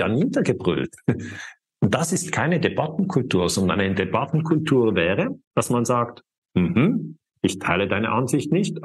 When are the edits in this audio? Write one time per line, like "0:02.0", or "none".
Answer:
0:01.6
0:05.4